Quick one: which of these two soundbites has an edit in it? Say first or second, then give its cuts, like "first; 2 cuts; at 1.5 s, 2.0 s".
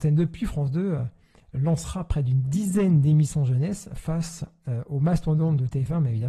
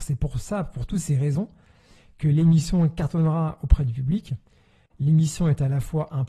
second; 1 cut; at 4.9 s